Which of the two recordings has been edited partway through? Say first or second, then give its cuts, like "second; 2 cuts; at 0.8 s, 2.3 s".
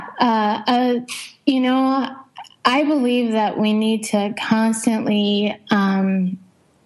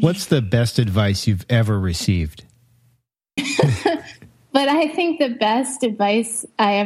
second; 1 cut; at 3.4 s